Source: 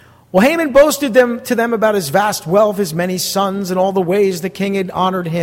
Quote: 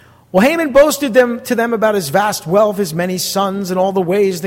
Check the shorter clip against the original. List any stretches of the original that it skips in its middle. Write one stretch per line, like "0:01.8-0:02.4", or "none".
none